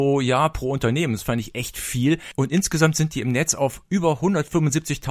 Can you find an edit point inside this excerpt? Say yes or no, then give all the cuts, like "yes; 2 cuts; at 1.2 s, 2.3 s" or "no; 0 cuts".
no; 0 cuts